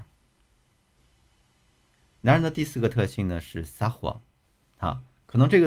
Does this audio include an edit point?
no; 0 cuts

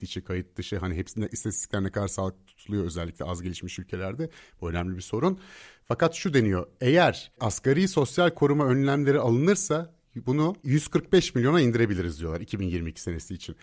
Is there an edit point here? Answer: no; 0 cuts

